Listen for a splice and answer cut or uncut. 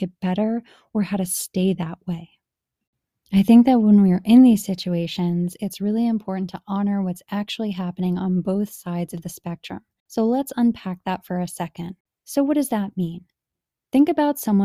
cut